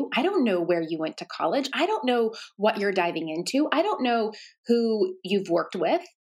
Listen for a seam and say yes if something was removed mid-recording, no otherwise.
yes